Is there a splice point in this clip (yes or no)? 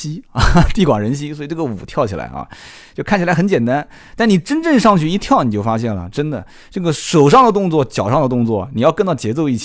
no